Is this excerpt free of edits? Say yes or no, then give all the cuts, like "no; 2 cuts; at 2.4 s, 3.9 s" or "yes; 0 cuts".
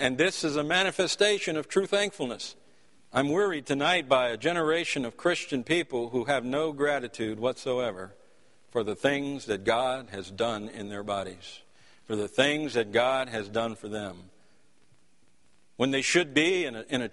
no; 1 cut; at 2.9 s